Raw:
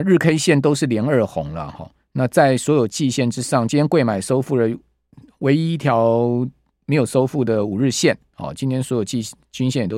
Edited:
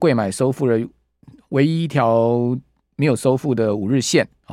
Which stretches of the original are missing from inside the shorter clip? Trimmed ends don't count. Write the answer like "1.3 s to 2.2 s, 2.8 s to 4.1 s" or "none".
none